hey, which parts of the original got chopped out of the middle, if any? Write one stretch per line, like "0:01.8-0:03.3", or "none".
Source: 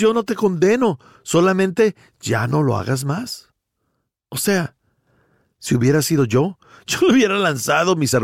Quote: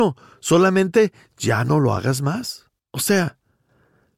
0:03.6-0:04.2